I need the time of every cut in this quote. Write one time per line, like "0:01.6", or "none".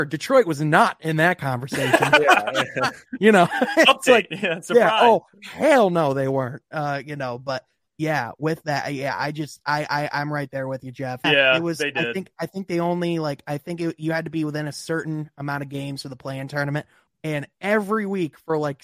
0:11.2
0:17.1